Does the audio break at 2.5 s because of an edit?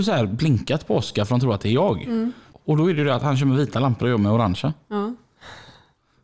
yes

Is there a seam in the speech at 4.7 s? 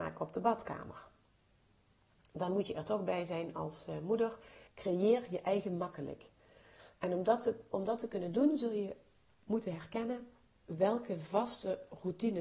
yes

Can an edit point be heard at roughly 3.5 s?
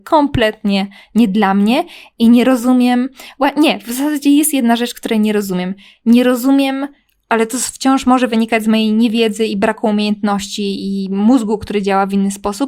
no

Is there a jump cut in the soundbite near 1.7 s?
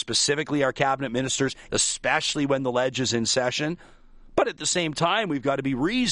yes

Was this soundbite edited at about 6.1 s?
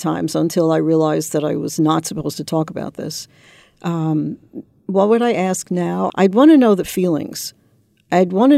yes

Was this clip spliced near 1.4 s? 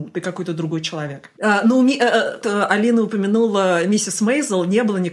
yes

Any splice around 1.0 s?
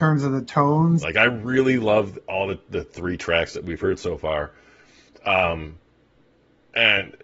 yes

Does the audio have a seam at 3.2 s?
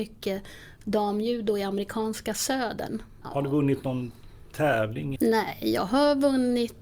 yes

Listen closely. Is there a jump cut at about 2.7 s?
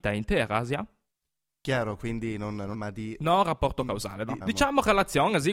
yes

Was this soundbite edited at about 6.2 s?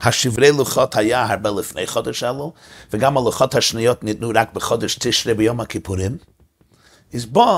no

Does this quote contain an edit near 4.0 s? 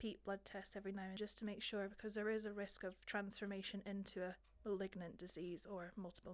no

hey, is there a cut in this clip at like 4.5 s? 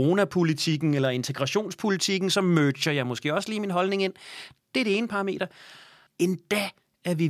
no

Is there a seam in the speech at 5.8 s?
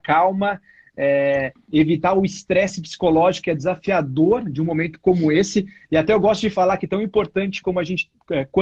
no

